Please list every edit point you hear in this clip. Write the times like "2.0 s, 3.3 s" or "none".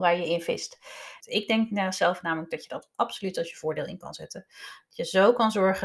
1.2 s